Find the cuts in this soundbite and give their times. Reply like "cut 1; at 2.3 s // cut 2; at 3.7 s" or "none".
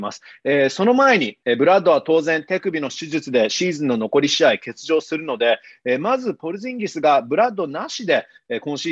cut 1; at 1.4 s